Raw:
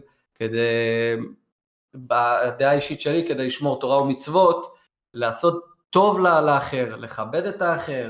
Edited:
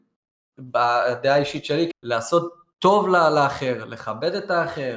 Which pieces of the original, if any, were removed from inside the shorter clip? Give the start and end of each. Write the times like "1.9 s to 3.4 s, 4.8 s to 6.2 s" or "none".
3.3 s to 5.0 s